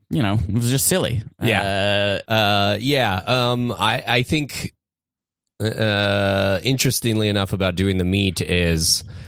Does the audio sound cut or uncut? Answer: cut